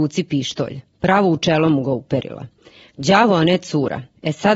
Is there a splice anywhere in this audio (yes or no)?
no